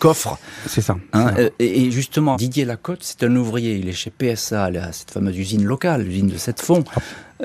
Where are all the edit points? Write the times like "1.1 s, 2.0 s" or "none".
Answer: 2.3 s